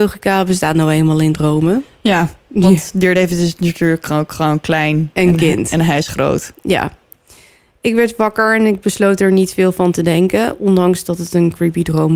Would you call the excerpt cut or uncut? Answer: uncut